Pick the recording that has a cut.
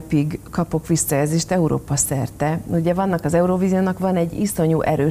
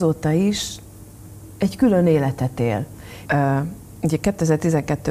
second; 1 cut; at 3.3 s

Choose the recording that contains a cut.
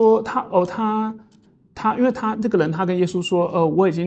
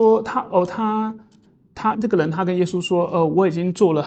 second; 1 cut; at 1.9 s

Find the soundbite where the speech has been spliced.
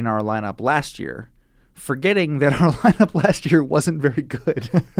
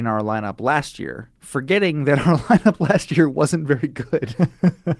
second; 1 cut; at 1.4 s

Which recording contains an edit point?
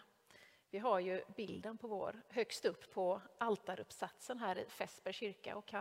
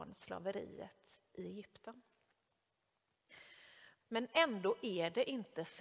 second; 1 cut; at 4.0 s

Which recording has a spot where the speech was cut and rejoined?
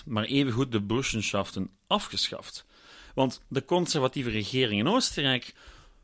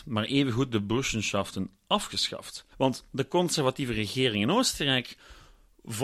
second; 1 cut; at 2.7 s

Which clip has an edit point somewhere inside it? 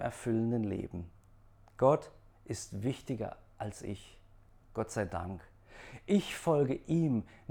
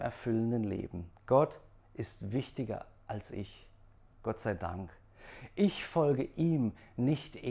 second; 1 cut; at 1.2 s

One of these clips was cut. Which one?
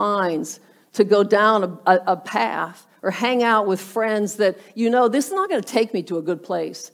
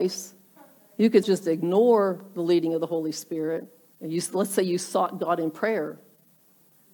second; 2 cuts; at 1.2 s, 3.9 s

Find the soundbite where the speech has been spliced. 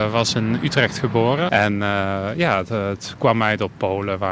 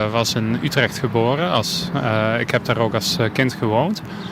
first; 1 cut; at 1.5 s

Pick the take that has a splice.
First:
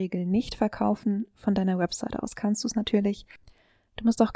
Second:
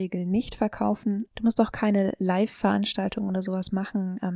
second; 1 cut; at 1.3 s

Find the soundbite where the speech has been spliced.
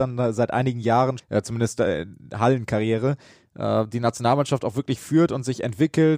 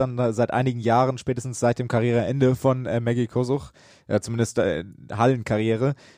first; 1 cut; at 1.2 s

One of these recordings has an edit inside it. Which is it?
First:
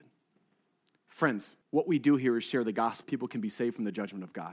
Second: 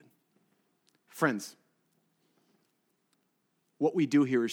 first; 2 cuts; at 1.6 s, 3.0 s

